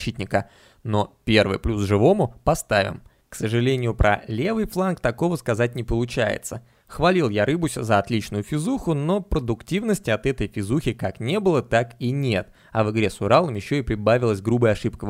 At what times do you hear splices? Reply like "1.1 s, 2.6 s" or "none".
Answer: 3.2 s